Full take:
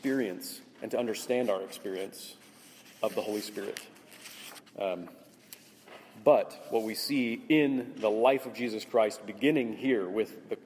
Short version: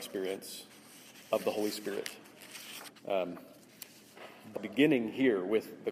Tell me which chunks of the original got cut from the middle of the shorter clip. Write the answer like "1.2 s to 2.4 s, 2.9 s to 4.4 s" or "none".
6.2 s to 9.2 s